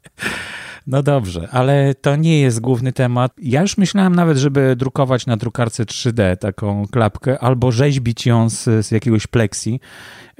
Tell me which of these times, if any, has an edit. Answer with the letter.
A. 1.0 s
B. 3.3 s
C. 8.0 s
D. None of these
B